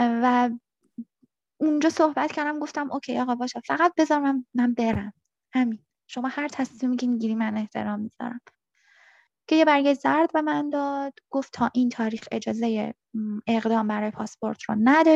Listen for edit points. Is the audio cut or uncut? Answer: uncut